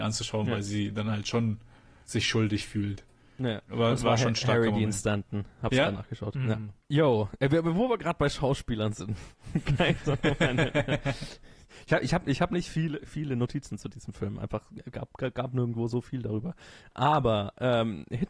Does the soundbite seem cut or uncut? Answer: uncut